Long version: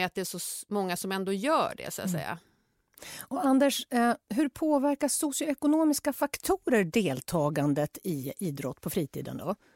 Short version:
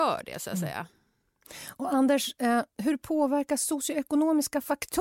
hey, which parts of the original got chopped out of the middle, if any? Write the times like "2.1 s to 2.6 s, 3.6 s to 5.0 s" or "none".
none